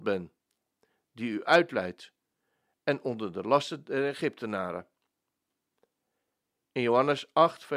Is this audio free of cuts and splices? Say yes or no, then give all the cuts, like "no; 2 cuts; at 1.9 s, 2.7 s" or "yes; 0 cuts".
yes; 0 cuts